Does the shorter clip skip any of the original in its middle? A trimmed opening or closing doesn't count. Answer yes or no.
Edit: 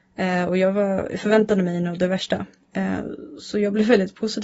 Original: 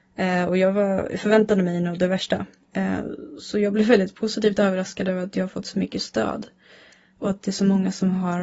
no